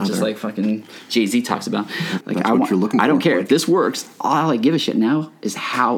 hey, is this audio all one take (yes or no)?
no